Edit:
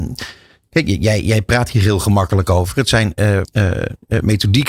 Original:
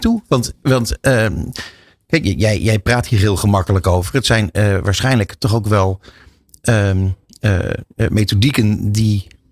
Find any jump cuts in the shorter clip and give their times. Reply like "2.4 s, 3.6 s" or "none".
3.4 s